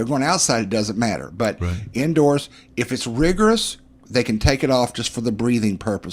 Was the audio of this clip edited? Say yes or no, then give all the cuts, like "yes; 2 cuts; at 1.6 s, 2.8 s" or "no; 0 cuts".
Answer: no; 0 cuts